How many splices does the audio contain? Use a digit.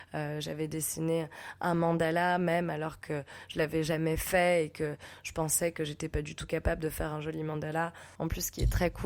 1